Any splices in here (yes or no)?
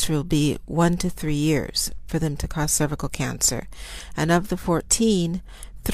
no